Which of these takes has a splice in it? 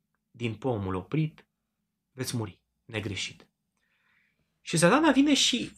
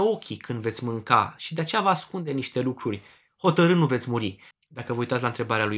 second; 1 cut; at 4.5 s

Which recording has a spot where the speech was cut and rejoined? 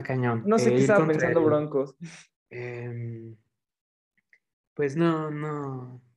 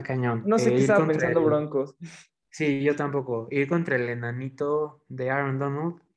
first; 1 cut; at 2.3 s

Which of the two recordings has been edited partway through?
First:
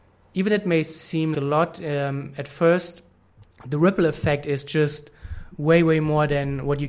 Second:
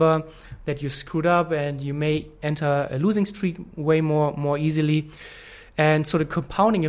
first; 1 cut; at 1.3 s

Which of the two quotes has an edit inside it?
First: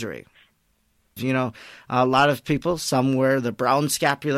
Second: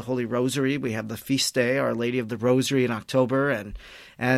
first; 1 cut; at 1.2 s

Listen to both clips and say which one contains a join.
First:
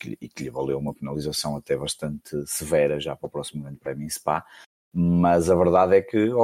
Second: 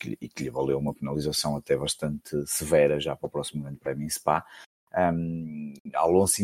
second; 1 cut; at 4.8 s

